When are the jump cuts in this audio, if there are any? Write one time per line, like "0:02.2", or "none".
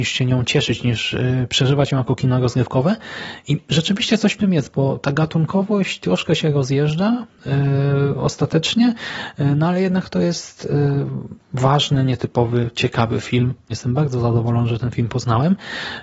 0:13.7